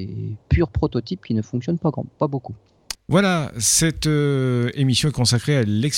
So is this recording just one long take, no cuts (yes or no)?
no